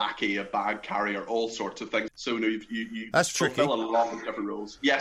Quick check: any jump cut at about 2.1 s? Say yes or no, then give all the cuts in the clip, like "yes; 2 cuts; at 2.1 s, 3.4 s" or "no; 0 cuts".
yes; 1 cut; at 2.1 s